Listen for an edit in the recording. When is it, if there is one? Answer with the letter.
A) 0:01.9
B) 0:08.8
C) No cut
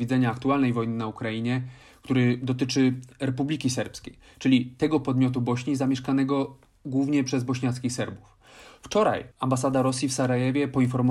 B